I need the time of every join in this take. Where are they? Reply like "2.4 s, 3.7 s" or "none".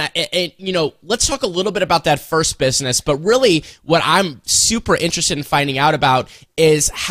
none